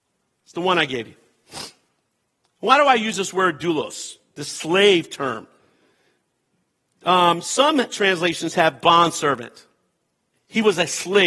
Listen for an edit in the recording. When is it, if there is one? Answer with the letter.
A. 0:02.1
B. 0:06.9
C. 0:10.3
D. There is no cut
C